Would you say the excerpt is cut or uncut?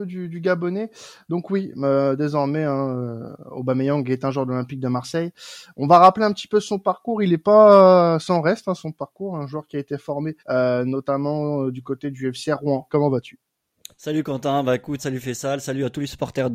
cut